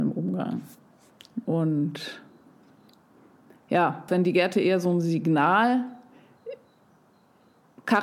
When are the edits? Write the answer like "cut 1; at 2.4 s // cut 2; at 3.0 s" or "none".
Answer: cut 1; at 1.4 s // cut 2; at 4.1 s